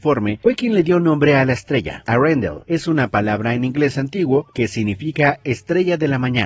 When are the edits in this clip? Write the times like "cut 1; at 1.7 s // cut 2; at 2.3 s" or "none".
none